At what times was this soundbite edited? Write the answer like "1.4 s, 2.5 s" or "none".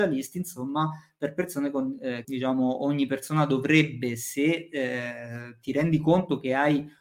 2.2 s